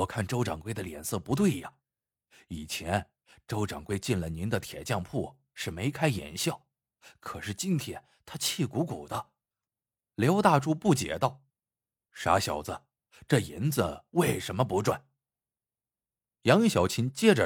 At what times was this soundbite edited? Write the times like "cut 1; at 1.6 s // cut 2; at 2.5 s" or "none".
cut 1; at 10.0 s // cut 2; at 11.5 s